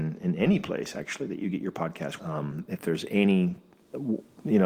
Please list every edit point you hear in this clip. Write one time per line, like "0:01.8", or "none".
0:02.2